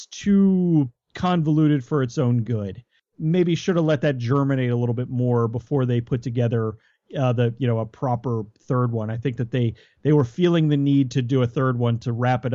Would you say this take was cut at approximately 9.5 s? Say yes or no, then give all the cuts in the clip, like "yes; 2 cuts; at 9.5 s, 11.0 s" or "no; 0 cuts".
no; 0 cuts